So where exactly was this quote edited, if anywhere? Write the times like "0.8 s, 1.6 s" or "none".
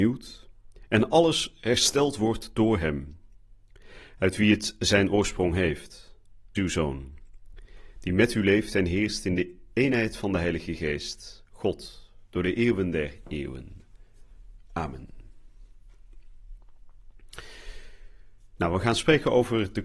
6.5 s